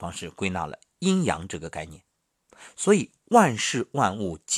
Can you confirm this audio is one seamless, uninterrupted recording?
yes; 0 cuts

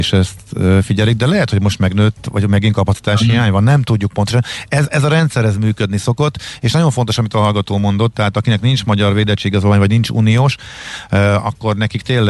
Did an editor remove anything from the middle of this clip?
no; 0 cuts

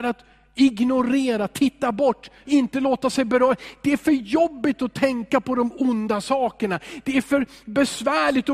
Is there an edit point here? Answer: yes; 1 cut; at 2.4 s

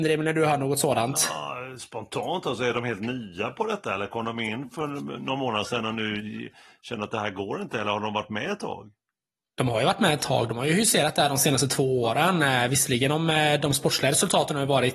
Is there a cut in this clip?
no; 0 cuts

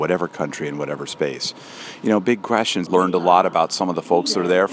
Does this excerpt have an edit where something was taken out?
yes; 1 cut; at 2.8 s

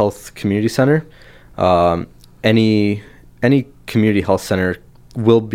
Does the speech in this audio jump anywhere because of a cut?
no; 0 cuts

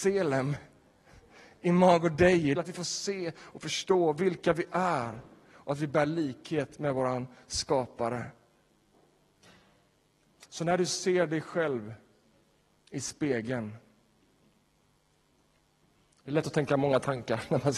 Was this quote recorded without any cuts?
no; 1 cut; at 2.5 s

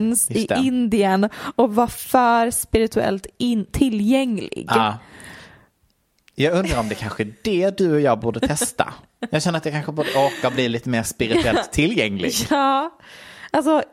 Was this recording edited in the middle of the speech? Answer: no; 0 cuts

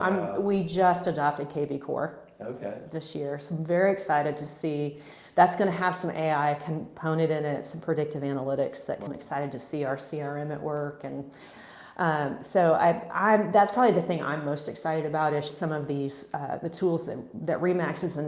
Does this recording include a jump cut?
yes; 2 cuts; at 9.1 s, 15.5 s

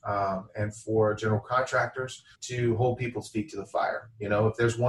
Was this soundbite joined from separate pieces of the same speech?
yes; 1 cut; at 2.3 s

